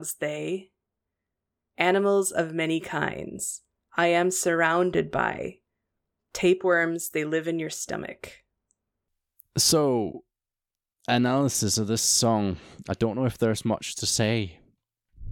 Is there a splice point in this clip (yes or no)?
no